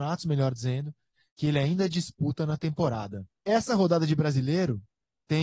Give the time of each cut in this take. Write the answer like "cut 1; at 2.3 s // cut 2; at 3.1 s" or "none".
cut 1; at 3.4 s

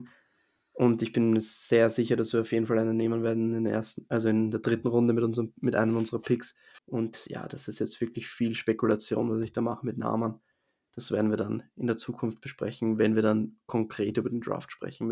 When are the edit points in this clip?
cut 1; at 6.8 s

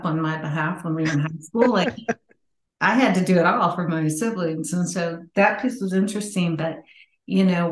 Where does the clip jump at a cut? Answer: none

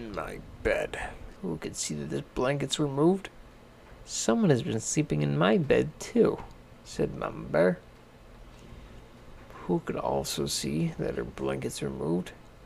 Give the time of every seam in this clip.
cut 1; at 1.3 s

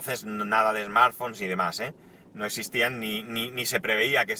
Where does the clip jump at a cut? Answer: none

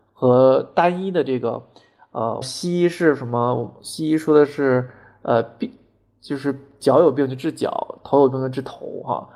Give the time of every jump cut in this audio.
cut 1; at 2.4 s

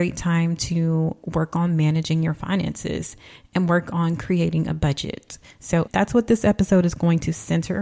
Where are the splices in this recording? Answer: cut 1; at 5.9 s

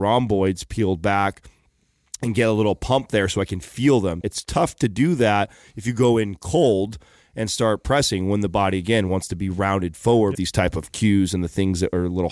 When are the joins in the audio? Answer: cut 1; at 4.2 s // cut 2; at 10.4 s

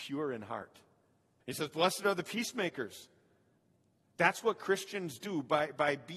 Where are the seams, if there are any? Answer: cut 1; at 1.4 s

